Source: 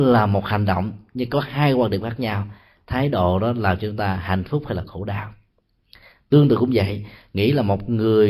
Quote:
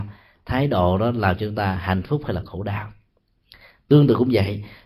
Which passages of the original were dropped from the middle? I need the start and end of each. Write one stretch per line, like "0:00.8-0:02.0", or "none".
none